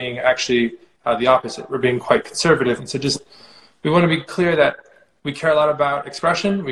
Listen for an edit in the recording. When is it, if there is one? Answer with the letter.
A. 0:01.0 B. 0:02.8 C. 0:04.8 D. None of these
B